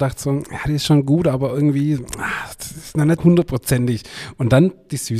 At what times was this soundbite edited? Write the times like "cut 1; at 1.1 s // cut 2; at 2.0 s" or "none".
cut 1; at 3.2 s